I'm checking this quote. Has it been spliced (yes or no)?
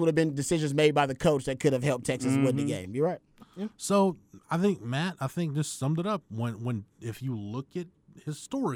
yes